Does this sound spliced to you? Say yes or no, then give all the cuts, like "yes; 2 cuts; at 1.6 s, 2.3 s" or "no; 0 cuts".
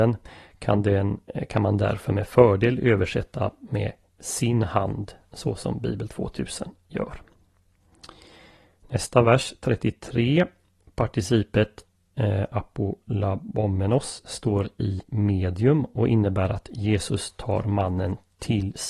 no; 0 cuts